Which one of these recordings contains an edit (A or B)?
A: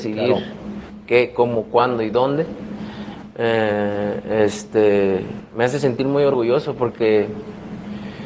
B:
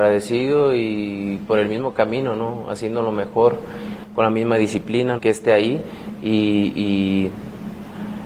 B